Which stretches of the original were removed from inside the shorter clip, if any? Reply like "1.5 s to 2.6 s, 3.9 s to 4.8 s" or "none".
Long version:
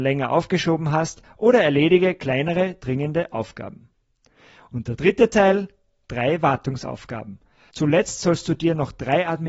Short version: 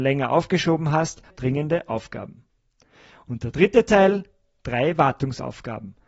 1.3 s to 2.7 s